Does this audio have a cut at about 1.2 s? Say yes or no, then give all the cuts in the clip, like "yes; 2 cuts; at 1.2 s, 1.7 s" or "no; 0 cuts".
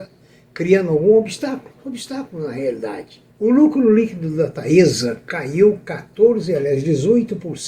no; 1 cut; at 3.3 s